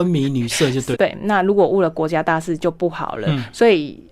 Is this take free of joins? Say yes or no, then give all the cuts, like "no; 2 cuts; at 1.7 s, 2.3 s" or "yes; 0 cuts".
no; 1 cut; at 0.9 s